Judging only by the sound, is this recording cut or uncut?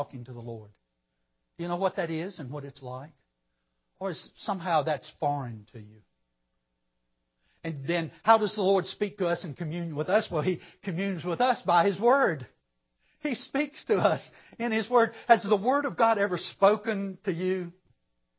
uncut